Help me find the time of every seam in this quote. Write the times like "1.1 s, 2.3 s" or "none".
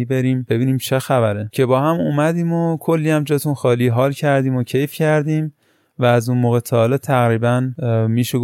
none